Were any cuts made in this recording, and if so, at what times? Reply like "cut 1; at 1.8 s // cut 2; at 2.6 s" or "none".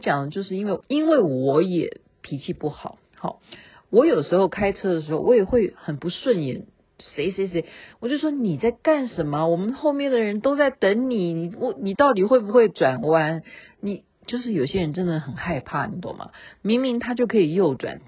none